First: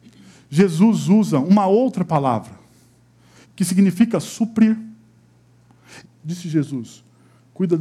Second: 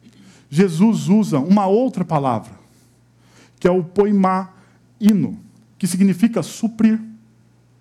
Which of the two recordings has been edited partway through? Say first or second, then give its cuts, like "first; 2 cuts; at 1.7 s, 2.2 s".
first; 2 cuts; at 3.4 s, 6.0 s